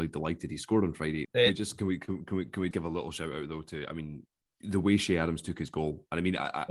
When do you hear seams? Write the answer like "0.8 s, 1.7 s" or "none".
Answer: 1.2 s, 2.7 s

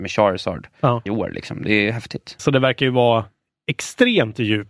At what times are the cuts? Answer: 1.1 s, 2.4 s

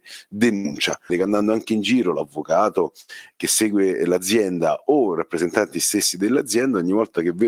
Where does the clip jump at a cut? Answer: 1.1 s

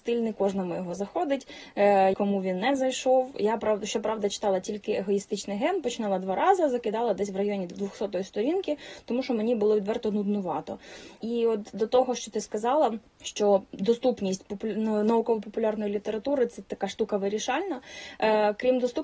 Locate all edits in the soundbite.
2.1 s

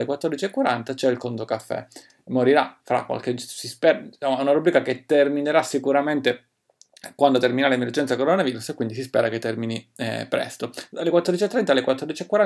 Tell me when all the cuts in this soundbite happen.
none

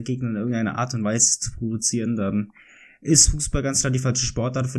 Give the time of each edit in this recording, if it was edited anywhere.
none

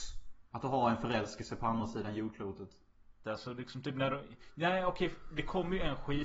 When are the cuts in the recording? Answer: 3.2 s

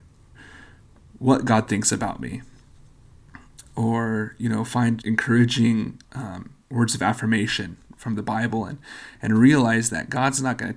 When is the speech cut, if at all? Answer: 5.0 s

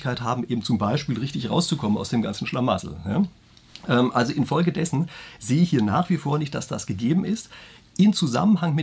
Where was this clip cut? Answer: none

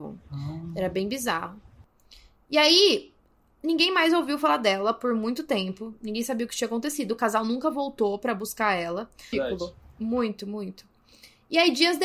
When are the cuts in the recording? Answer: 9.3 s

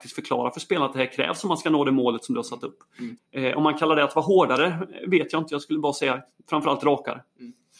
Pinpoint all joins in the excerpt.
3.2 s

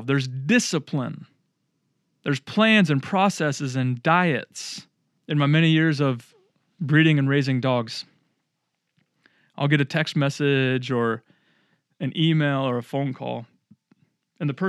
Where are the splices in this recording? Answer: 5.2 s

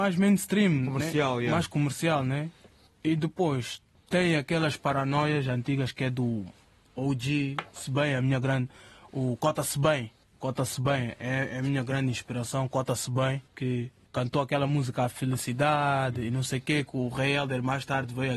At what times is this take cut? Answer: none

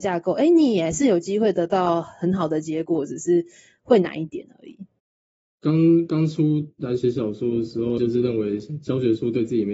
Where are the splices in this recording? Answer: 5.4 s, 8.0 s

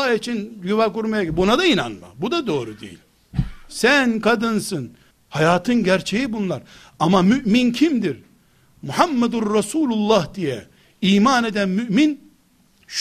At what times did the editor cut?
5.1 s

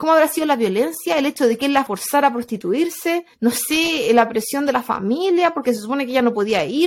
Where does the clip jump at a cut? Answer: 1.9 s, 3.3 s

